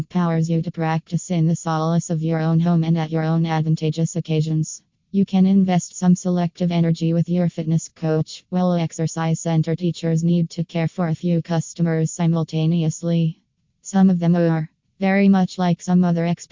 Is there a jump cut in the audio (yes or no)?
yes